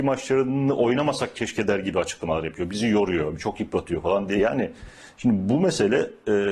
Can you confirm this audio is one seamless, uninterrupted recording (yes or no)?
yes